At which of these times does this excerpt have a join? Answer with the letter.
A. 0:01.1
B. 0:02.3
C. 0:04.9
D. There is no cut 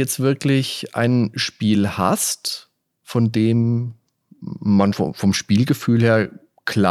C